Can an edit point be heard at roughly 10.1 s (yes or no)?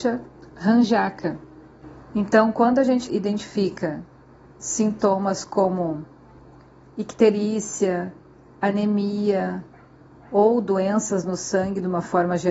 no